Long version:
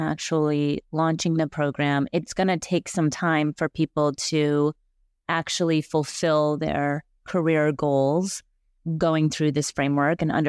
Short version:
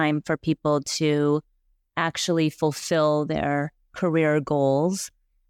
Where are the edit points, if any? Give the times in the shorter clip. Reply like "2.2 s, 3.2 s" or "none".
none